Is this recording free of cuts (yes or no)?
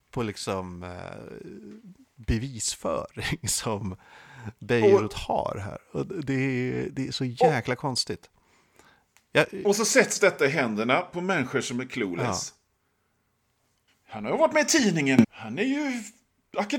no